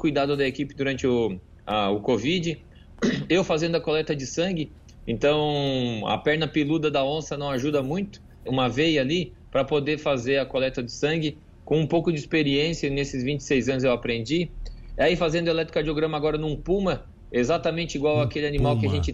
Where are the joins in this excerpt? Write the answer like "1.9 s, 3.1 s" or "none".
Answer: 8.5 s

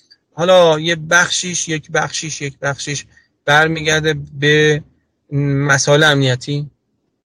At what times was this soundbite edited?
none

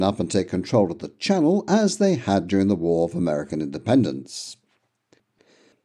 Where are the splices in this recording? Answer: none

